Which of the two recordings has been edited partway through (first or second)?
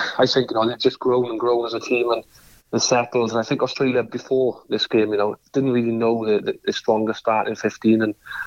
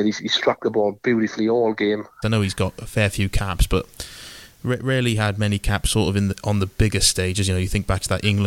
second